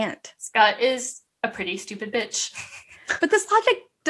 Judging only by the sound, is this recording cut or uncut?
uncut